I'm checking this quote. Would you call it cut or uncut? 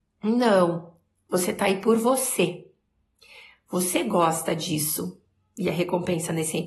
uncut